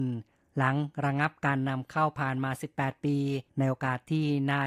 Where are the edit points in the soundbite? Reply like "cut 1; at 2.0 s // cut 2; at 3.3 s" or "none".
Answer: cut 1; at 3.5 s

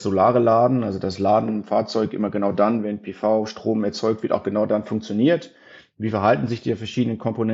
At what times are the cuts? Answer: none

